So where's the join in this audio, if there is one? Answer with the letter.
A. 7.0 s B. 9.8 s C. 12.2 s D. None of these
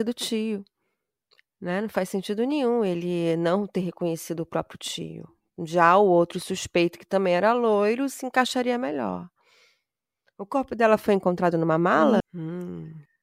C